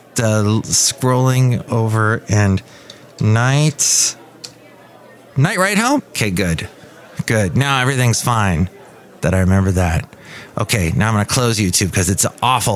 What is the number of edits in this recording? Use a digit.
1